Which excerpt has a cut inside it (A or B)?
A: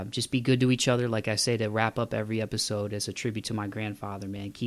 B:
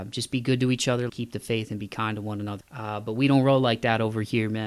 B